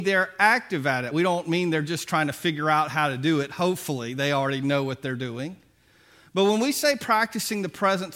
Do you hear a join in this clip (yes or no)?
no